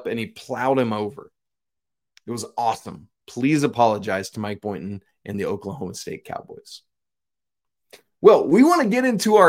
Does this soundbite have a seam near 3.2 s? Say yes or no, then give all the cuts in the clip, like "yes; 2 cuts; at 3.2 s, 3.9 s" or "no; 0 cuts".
yes; 1 cut; at 3.2 s